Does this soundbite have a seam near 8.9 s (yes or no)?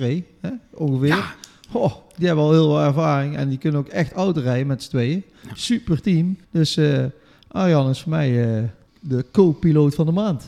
yes